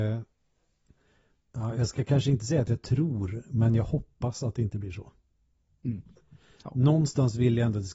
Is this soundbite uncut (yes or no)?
yes